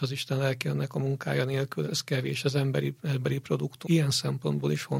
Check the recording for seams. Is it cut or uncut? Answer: cut